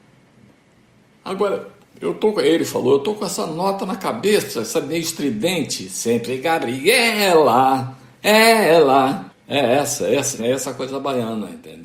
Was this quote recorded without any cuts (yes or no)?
no